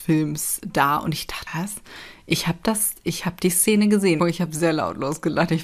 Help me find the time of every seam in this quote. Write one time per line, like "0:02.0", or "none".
0:01.5
0:04.2